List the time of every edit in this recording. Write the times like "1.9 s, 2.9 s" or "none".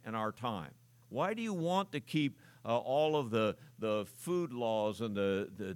1.0 s